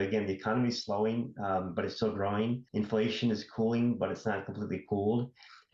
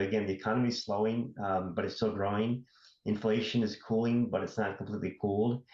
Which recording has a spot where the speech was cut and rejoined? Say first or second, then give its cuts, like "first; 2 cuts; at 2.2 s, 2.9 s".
first; 1 cut; at 2.7 s